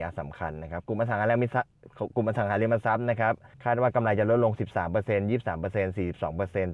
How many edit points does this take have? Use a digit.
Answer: 1